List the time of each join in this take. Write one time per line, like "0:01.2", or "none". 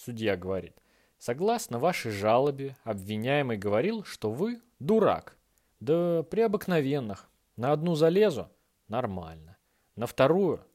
0:05.7